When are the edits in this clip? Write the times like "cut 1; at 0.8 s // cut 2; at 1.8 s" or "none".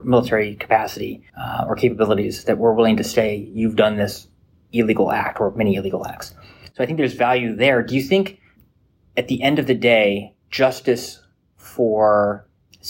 cut 1; at 1.3 s // cut 2; at 10.4 s